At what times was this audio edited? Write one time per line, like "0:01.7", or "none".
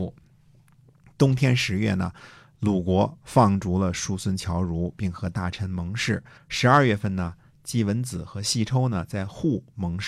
0:06.4